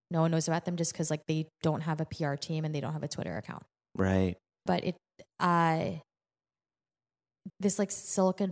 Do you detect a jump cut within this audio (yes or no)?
yes